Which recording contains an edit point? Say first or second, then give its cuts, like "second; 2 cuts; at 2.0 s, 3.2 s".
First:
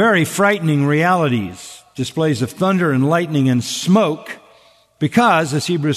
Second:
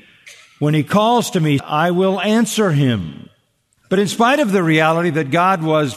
second; 2 cuts; at 1.6 s, 3.8 s